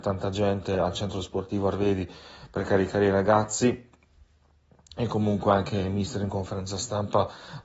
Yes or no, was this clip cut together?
no